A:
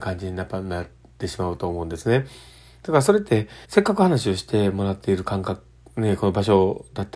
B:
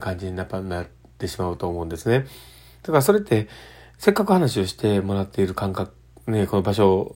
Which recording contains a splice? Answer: A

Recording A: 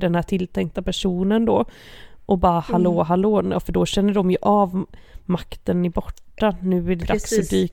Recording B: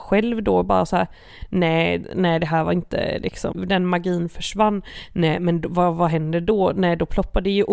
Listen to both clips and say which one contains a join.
B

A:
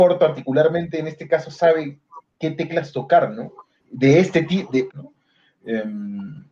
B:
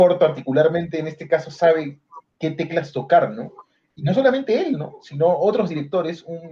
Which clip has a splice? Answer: A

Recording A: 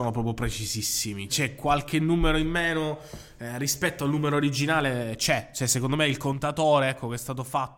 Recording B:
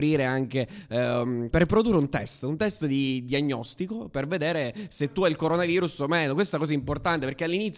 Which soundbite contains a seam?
B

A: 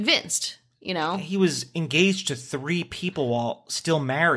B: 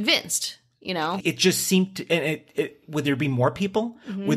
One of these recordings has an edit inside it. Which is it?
B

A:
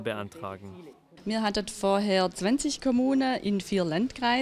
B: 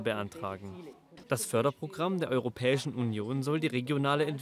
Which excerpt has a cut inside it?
B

